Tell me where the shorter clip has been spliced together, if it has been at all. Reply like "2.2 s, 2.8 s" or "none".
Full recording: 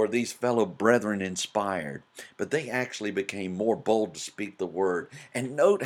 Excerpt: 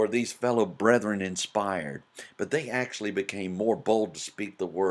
none

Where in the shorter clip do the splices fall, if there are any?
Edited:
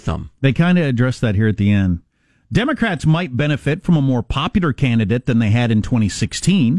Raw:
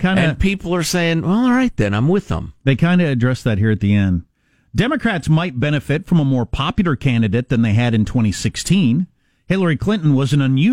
none

